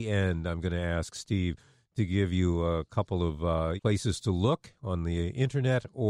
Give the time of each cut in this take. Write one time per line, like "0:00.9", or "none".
0:03.8